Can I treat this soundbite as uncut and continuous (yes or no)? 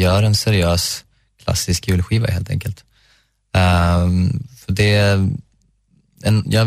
yes